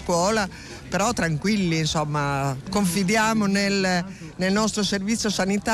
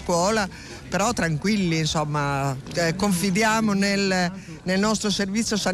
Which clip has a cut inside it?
first; 1 cut; at 2.7 s

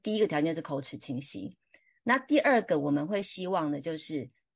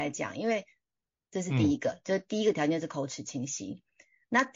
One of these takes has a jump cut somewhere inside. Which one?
second; 1 cut; at 1.2 s

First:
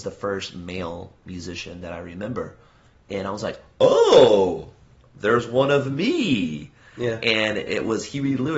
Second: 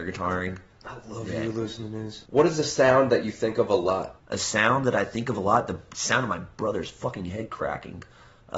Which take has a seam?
second; 2 cuts; at 2.3 s, 4.2 s

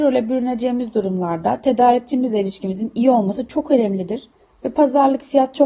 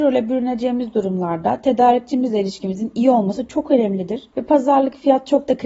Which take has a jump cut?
second; 1 cut; at 4.3 s

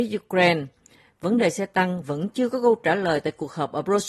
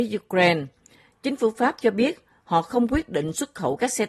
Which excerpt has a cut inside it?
second; 1 cut; at 1.1 s

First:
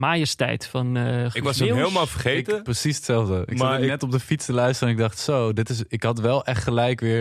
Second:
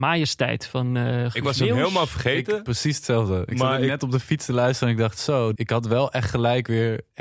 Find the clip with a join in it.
second; 1 cut; at 5.5 s

